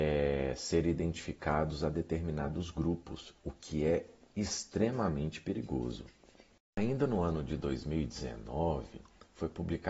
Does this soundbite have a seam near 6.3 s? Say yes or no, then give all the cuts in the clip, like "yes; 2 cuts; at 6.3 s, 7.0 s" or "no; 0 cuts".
no; 1 cut; at 4.2 s